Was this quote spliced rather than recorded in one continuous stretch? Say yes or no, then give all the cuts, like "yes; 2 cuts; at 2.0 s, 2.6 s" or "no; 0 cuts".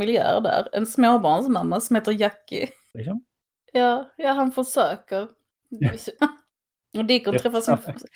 yes; 2 cuts; at 2.9 s, 6.2 s